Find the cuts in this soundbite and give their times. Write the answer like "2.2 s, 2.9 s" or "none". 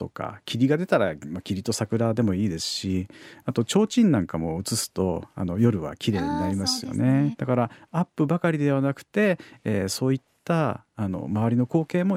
7.3 s